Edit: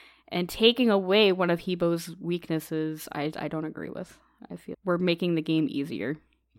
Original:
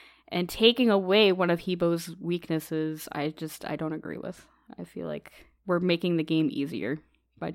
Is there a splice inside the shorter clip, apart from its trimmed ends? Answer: yes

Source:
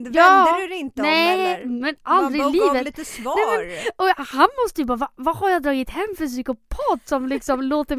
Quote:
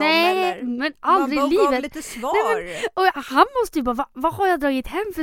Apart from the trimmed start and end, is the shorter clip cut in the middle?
no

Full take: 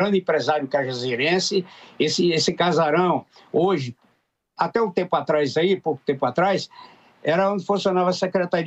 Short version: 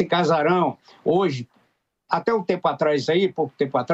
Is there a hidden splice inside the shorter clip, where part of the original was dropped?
no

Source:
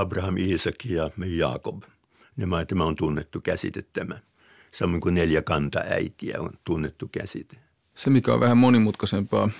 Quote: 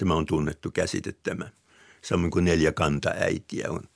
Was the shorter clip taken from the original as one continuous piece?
yes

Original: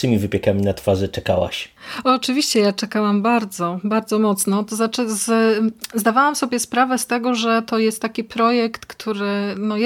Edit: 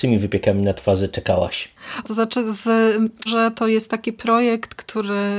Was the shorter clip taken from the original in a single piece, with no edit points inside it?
no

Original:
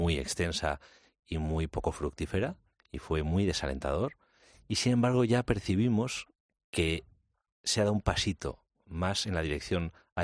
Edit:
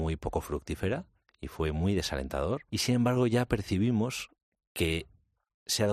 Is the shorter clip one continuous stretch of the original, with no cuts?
no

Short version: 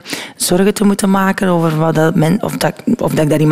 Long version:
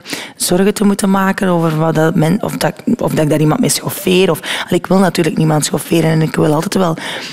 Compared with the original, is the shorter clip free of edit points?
yes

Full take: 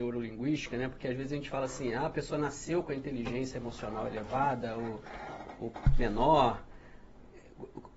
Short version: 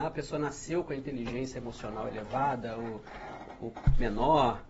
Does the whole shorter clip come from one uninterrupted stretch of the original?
yes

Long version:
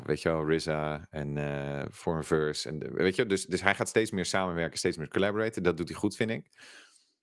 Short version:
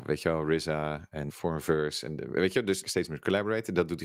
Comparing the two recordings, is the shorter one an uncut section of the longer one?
no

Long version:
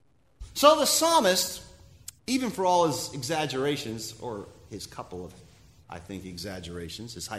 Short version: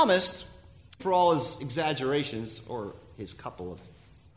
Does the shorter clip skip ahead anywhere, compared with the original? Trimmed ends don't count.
yes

